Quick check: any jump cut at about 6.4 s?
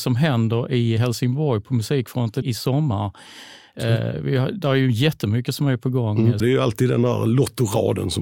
yes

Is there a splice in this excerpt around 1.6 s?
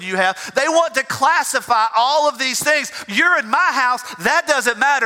no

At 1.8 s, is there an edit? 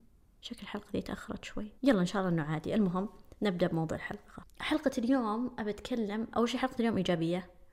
yes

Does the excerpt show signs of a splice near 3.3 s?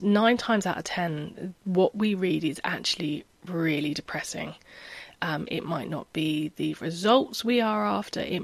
no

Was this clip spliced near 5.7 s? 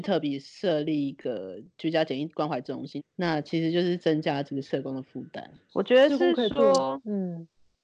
yes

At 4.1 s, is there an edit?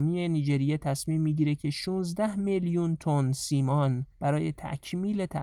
yes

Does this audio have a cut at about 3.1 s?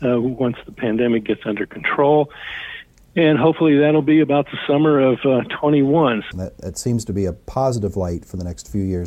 no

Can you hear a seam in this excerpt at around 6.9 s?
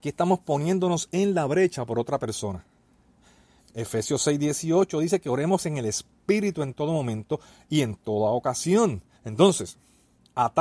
no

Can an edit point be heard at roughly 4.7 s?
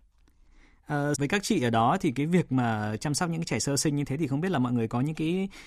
no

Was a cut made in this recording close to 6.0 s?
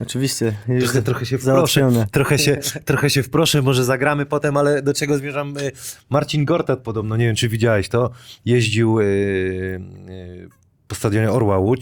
no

